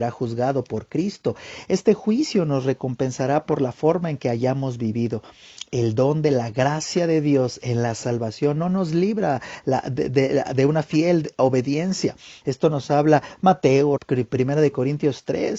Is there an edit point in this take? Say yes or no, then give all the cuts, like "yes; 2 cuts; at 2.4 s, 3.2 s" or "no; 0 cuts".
yes; 2 cuts; at 12.4 s, 14.0 s